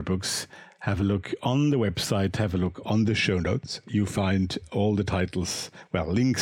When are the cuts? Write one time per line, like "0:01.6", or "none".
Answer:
none